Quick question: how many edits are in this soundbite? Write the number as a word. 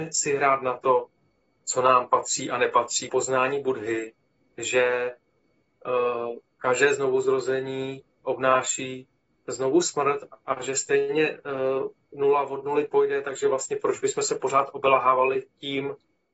one